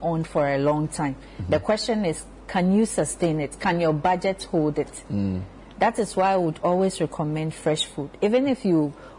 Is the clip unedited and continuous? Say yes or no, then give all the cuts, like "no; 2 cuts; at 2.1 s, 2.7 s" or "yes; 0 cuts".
yes; 0 cuts